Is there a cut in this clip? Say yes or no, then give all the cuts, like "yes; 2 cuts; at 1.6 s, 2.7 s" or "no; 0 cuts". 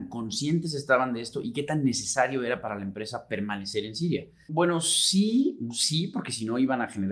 yes; 1 cut; at 4.5 s